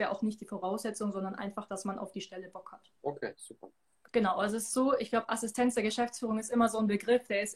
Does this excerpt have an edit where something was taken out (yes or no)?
yes